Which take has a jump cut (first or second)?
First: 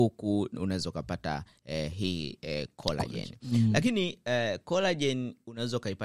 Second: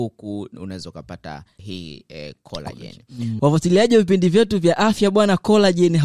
second